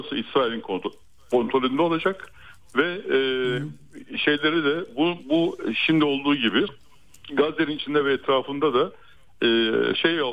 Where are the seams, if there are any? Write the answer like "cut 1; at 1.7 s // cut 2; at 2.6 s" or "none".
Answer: none